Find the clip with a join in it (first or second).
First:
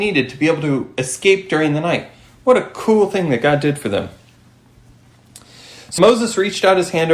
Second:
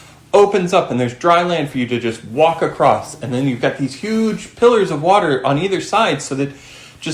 first